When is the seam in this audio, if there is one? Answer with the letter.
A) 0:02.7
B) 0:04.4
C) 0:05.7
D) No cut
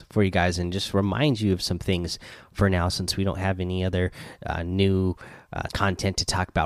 C